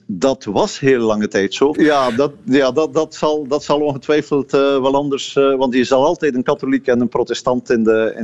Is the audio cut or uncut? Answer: cut